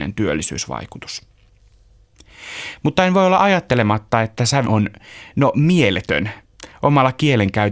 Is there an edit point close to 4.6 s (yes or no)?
yes